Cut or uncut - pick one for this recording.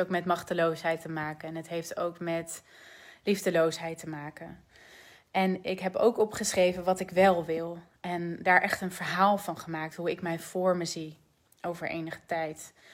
uncut